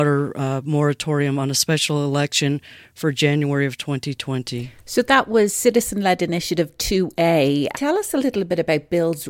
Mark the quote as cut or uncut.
cut